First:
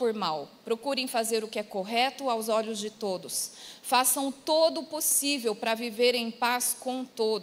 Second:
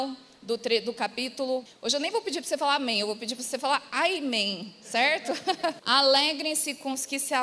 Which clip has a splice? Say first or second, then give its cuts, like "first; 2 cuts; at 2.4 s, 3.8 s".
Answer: second; 2 cuts; at 1.7 s, 5.8 s